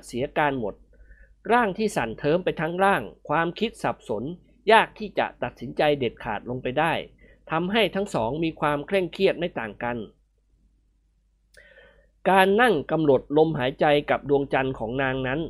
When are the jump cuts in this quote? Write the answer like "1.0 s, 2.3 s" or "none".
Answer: none